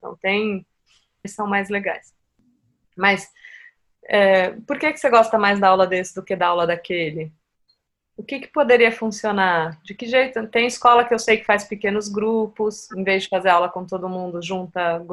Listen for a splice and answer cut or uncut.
cut